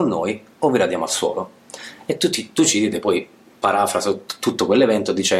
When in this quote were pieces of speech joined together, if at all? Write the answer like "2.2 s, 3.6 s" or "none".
none